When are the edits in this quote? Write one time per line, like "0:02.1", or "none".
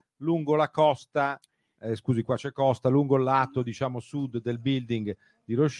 none